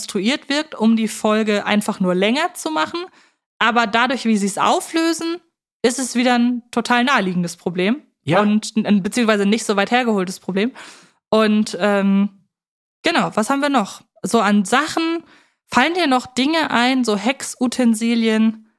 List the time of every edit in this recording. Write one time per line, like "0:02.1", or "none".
none

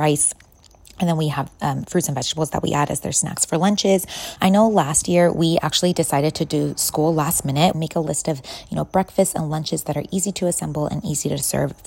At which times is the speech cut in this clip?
0:04.4
0:07.7

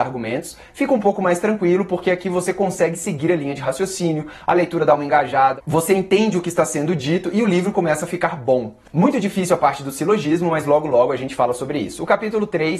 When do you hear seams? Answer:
none

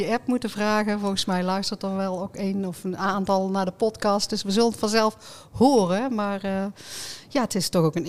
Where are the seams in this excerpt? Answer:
none

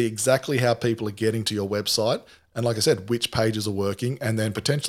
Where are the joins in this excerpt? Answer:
none

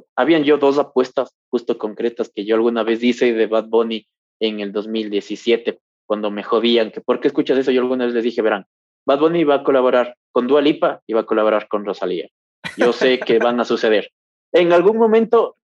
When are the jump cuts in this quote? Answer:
none

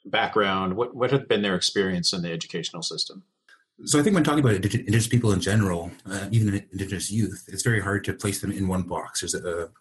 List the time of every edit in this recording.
none

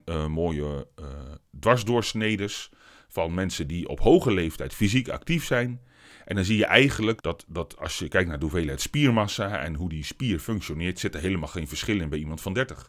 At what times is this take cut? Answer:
0:07.2

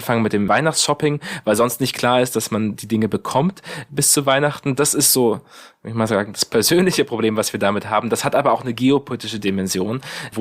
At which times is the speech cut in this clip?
none

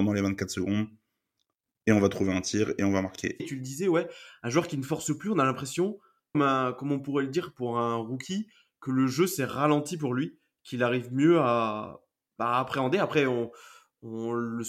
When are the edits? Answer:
0:03.4
0:06.3

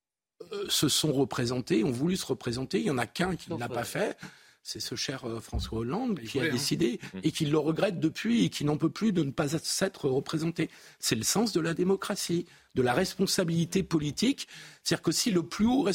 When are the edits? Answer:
none

